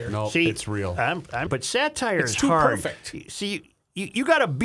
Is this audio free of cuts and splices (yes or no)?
no